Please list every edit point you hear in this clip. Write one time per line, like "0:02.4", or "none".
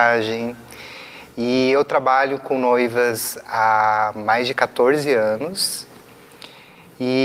none